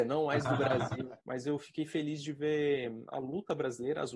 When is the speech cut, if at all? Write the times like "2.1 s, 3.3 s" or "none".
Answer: 1.2 s